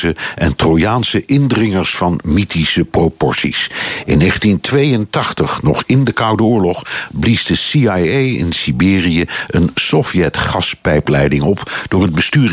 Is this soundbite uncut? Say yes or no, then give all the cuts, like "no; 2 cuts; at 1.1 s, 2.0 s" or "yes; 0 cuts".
yes; 0 cuts